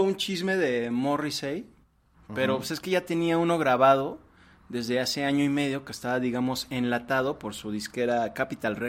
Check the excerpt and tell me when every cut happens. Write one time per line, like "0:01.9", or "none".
0:02.1